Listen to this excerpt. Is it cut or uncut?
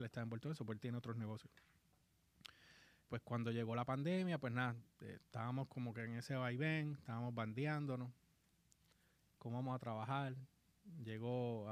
cut